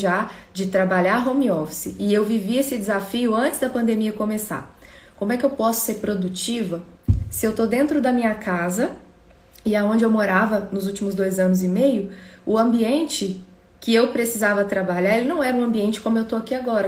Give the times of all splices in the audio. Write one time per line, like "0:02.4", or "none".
none